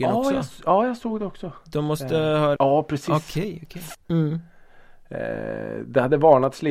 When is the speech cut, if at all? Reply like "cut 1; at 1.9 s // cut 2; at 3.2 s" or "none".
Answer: cut 1; at 2.6 s // cut 2; at 3.9 s

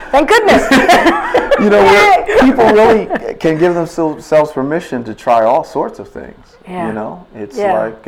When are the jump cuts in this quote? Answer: none

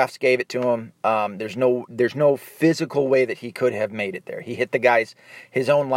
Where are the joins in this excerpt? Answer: none

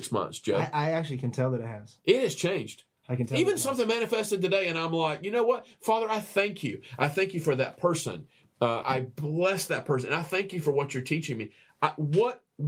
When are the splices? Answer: cut 1; at 8.8 s

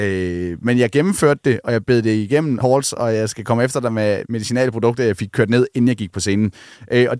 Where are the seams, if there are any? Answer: cut 1; at 2.6 s // cut 2; at 4.2 s

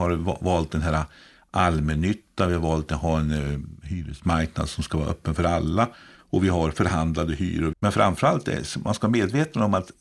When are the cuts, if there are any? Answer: cut 1; at 7.7 s

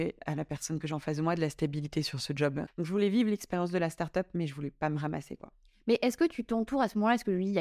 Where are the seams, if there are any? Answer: cut 1; at 2.7 s

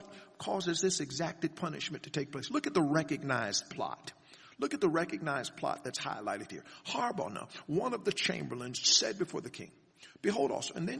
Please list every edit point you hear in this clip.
none

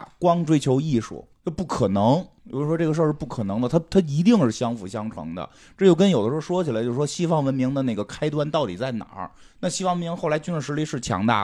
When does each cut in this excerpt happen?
none

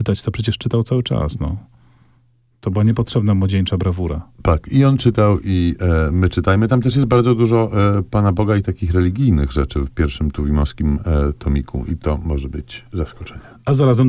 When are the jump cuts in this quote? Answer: none

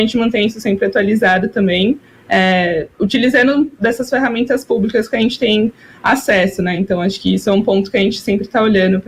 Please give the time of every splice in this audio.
none

